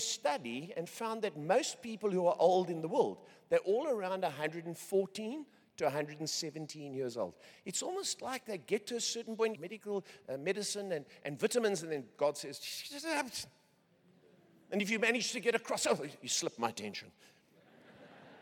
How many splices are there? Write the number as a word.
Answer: one